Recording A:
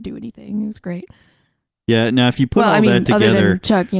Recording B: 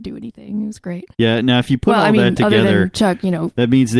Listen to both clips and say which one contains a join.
B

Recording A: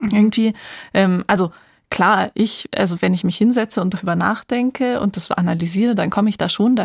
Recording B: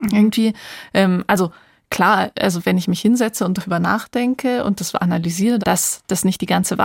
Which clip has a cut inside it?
B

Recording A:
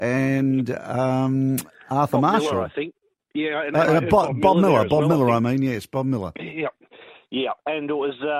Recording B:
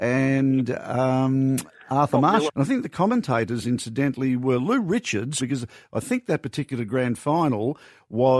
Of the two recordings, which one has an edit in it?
B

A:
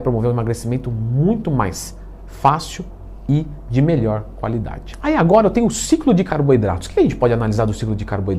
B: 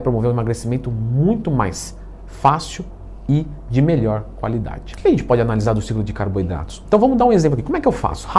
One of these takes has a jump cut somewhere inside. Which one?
B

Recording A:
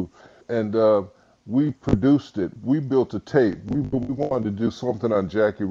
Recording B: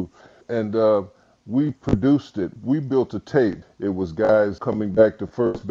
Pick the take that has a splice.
B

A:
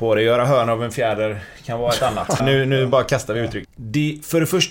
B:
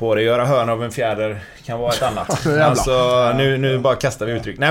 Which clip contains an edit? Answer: A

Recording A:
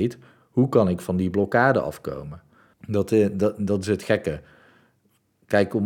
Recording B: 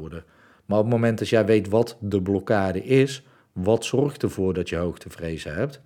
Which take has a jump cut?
A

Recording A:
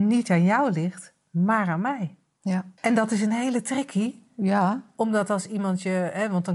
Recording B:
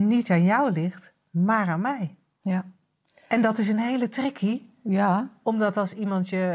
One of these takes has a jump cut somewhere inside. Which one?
A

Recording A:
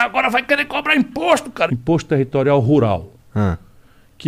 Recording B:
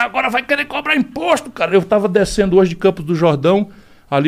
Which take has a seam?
A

